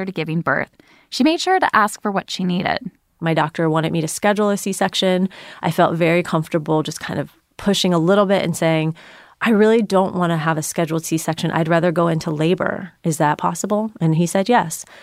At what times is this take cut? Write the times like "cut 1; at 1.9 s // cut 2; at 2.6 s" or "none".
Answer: none